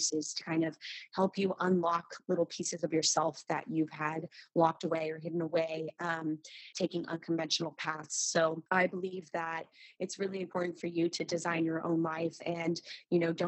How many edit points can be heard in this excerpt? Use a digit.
2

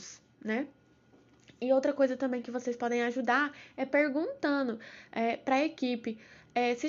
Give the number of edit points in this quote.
0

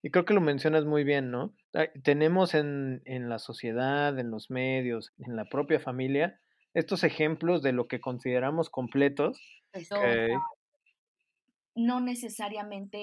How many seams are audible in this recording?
3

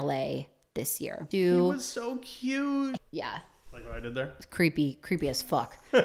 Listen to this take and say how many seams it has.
2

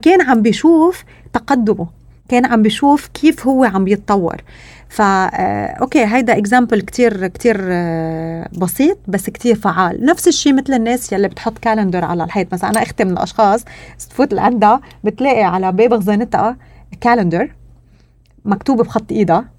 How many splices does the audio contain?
0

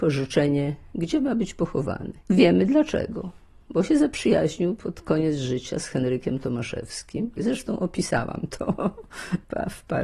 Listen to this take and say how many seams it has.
1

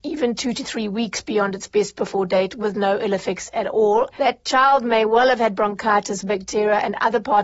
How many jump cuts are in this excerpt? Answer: 2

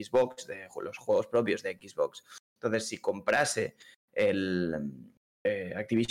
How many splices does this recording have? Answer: 0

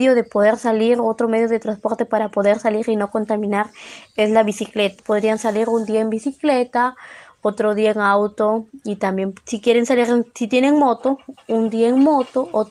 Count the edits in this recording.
2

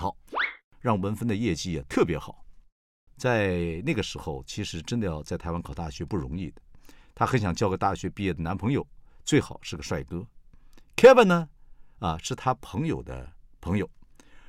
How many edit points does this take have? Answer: 1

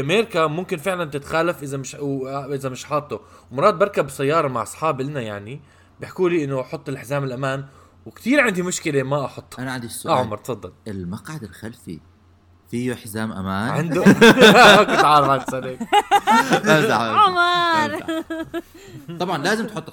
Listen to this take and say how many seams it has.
0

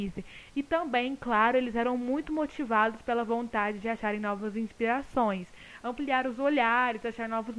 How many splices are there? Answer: 0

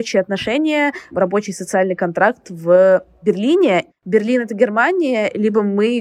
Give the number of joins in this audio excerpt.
1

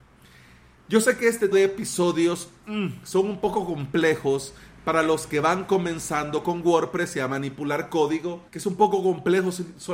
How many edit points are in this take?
2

